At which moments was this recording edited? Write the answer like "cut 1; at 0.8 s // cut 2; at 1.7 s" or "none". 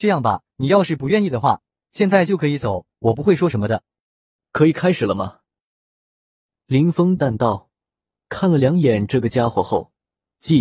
cut 1; at 7.2 s